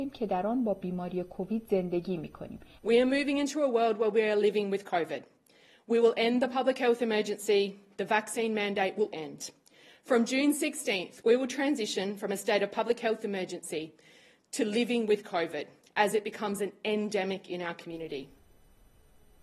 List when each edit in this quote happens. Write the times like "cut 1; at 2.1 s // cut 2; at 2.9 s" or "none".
cut 1; at 2.8 s // cut 2; at 9.1 s